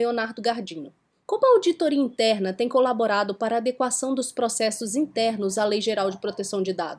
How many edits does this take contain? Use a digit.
1